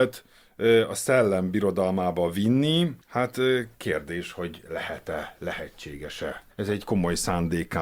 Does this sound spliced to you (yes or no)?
yes